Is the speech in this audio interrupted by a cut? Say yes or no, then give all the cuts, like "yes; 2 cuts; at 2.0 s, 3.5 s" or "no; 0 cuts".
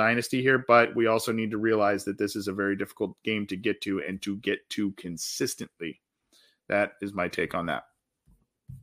no; 0 cuts